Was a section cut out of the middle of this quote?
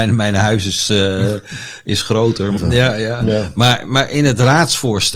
yes; 1 cut; at 2.6 s

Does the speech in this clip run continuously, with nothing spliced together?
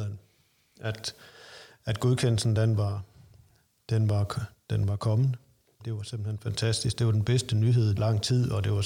no; 2 cuts; at 5.8 s, 8.0 s

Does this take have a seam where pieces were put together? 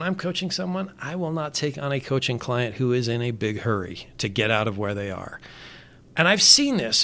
yes; 1 cut; at 6.0 s

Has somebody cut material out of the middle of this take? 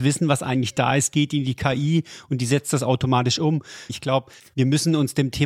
yes; 1 cut; at 3.9 s

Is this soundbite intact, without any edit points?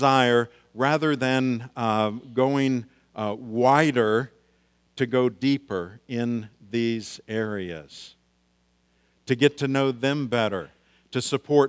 yes; 0 cuts

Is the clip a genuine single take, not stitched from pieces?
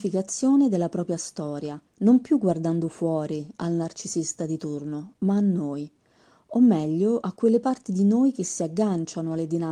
no; 1 cut; at 1.9 s

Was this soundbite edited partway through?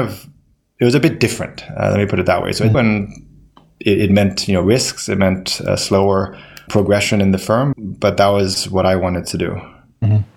yes; 3 cuts; at 2.7 s, 6.7 s, 7.7 s

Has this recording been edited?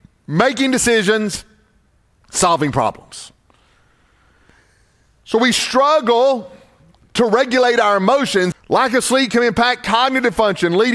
yes; 1 cut; at 8.5 s

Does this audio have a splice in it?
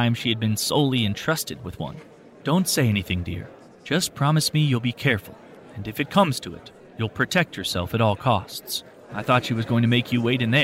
yes; 2 cuts; at 2.4 s, 9.1 s

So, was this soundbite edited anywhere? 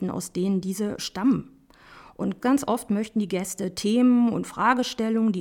yes; 1 cut; at 2.4 s

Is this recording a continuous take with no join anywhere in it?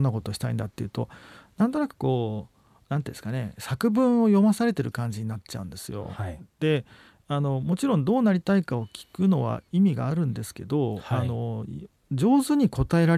yes; 0 cuts

